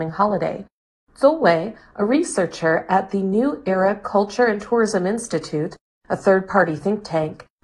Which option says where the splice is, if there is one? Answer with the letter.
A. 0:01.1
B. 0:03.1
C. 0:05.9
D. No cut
A